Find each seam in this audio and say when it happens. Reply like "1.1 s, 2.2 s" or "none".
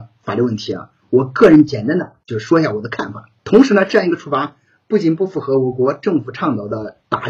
3.4 s